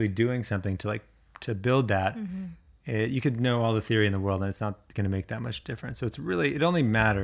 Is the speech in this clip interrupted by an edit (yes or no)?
no